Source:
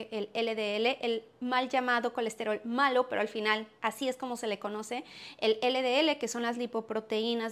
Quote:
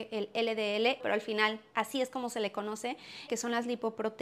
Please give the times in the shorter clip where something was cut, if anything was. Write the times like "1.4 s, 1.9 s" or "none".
1.0 s, 3.3 s